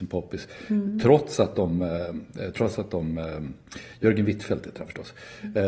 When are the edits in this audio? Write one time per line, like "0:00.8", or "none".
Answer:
none